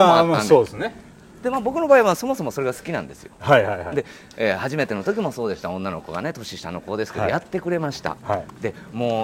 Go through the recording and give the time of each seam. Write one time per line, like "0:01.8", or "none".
none